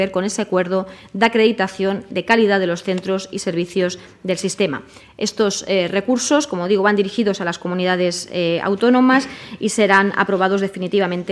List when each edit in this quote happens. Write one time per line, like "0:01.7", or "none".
none